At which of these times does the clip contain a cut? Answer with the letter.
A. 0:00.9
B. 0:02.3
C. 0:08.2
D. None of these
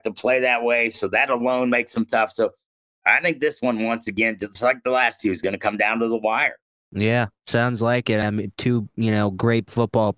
C